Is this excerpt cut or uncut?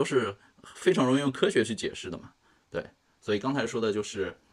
cut